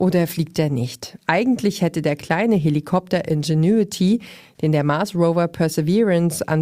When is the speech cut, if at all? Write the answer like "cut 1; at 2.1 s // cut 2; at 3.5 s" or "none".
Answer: none